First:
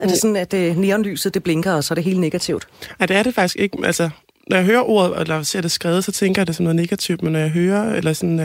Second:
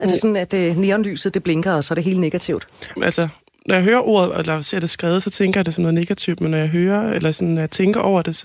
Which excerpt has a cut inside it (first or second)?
second